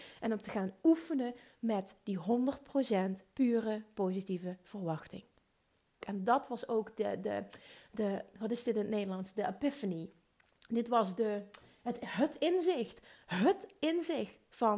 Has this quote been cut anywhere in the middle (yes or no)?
yes